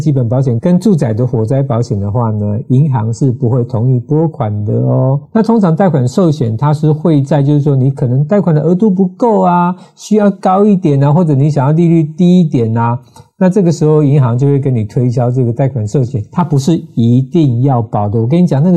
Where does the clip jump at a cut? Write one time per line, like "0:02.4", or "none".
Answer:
0:05.3